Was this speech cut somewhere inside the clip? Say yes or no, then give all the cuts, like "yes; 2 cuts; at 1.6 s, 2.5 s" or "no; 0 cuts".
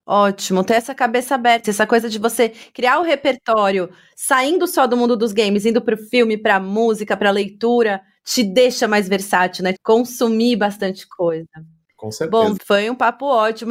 yes; 3 cuts; at 1.6 s, 9.7 s, 12.6 s